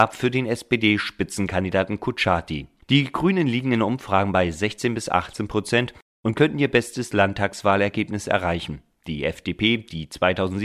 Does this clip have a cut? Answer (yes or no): yes